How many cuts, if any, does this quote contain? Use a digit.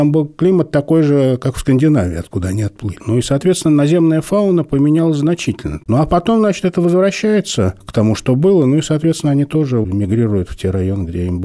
2